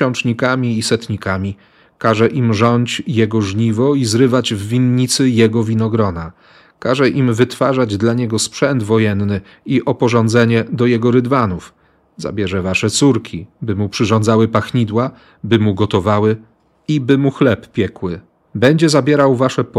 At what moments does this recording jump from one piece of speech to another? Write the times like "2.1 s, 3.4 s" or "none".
none

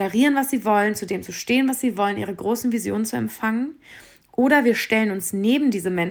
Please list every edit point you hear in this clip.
none

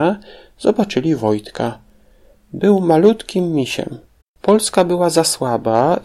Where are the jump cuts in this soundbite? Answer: 4.2 s

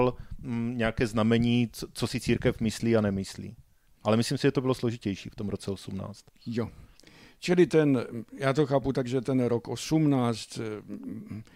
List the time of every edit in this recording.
none

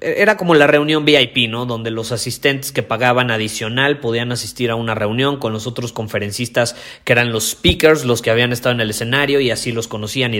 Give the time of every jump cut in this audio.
none

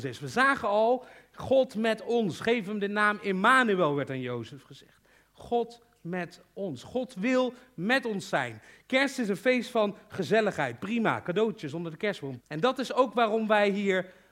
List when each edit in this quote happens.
12.4 s

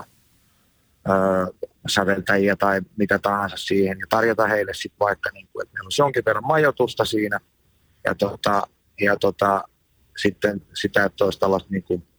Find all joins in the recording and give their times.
none

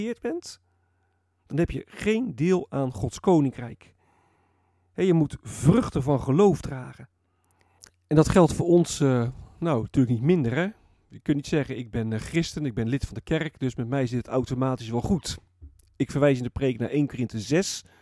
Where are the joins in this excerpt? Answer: none

